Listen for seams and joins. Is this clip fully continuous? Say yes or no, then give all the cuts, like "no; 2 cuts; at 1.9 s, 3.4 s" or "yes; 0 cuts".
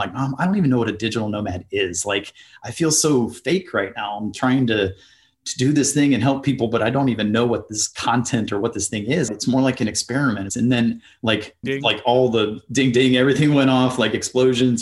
no; 3 cuts; at 9.3 s, 10.5 s, 11.6 s